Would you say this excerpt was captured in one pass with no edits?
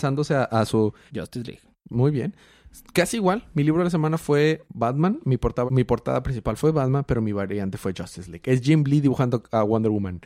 no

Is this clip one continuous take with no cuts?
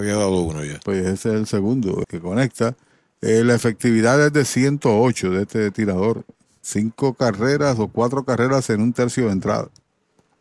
no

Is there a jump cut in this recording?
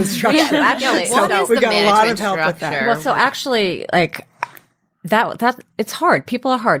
no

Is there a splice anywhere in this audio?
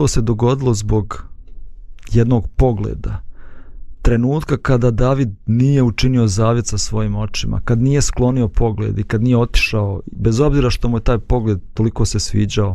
no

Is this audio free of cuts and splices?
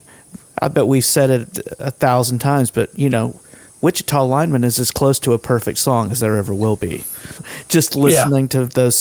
no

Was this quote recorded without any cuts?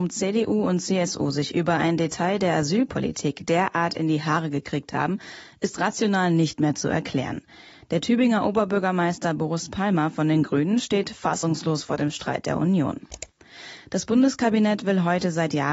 yes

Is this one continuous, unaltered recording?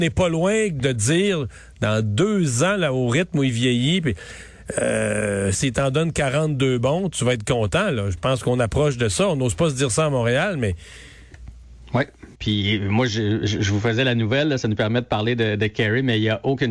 no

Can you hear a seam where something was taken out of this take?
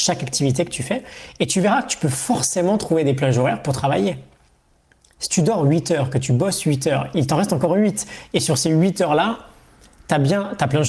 no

